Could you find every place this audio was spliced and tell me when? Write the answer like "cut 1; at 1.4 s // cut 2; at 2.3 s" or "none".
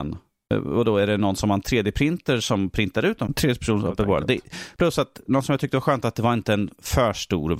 cut 1; at 3.3 s